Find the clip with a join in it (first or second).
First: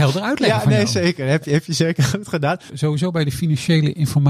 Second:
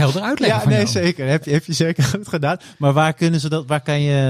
first